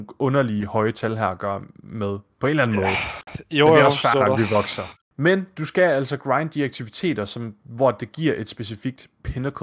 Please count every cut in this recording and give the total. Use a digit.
1